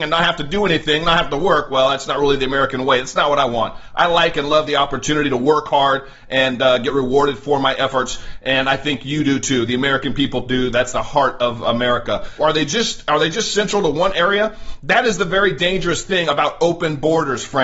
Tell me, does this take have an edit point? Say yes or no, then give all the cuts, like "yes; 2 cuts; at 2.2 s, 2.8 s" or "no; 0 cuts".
yes; 1 cut; at 12.4 s